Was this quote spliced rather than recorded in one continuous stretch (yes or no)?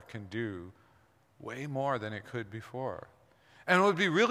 no